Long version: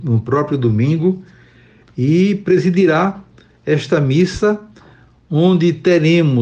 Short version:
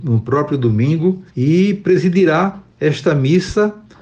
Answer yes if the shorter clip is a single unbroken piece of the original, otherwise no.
no